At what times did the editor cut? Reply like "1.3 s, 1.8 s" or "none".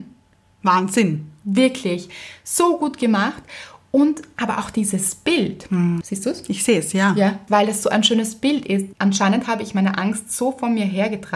6.0 s, 7.5 s, 8.9 s